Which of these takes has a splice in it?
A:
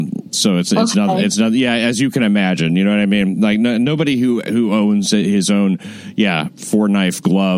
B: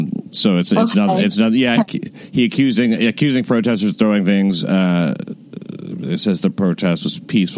B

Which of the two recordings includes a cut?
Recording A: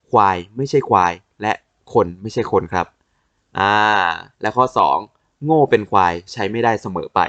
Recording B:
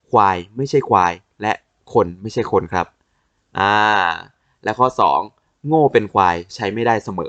A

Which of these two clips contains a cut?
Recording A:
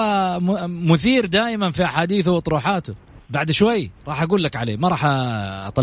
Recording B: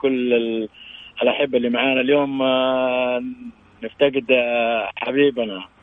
A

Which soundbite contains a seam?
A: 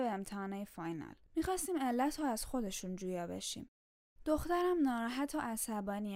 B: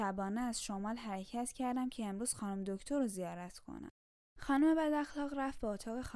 A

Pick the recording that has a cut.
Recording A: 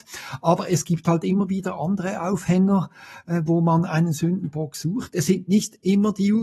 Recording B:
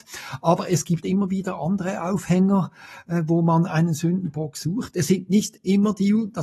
B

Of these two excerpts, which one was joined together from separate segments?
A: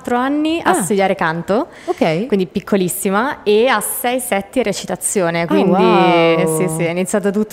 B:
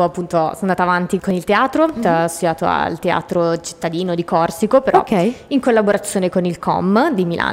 B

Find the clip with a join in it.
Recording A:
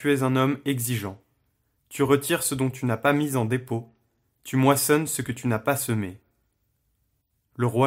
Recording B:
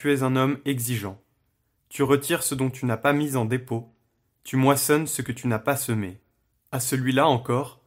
B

